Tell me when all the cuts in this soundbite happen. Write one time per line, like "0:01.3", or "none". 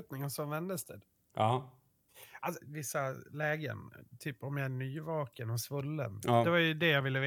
0:02.6
0:06.2